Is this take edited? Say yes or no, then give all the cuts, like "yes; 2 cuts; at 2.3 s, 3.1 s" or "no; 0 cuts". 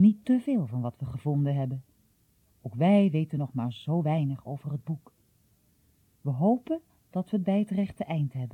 yes; 1 cut; at 6.1 s